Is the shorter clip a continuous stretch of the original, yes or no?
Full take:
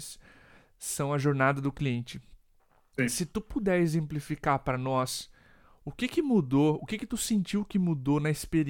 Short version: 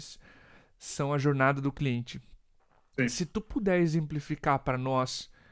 yes